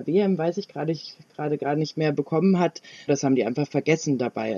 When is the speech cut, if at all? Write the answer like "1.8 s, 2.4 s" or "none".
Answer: 3.1 s